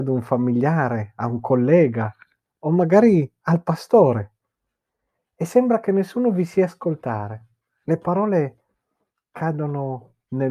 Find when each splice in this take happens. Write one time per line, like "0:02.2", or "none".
none